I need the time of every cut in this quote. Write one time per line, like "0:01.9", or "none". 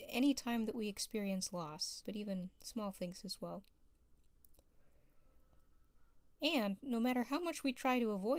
0:02.0